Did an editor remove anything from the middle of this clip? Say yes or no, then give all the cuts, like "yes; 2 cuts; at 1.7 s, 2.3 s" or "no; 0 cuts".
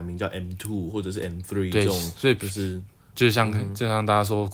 no; 0 cuts